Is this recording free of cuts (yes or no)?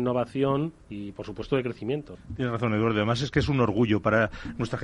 no